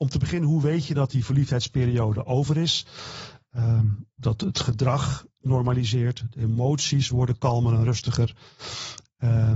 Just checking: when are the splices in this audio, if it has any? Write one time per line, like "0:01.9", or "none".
0:04.1